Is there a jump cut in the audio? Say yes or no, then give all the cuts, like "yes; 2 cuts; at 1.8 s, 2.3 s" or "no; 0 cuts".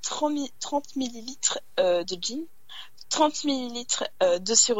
no; 0 cuts